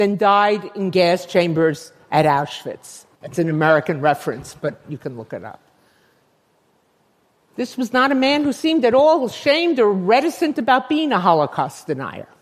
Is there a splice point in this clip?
no; 0 cuts

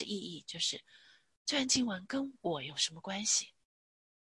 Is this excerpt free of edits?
yes; 0 cuts

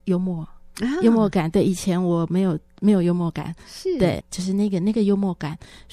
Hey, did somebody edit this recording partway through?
yes; 1 cut; at 4.2 s

